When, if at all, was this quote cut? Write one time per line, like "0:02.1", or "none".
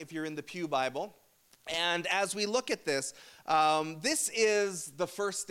none